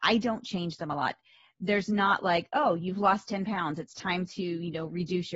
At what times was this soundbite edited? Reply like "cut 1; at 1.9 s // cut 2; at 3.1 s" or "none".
none